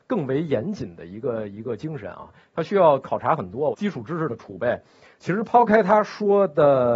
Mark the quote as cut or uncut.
cut